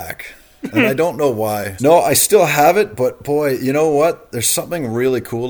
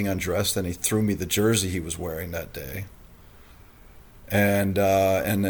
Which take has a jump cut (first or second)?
first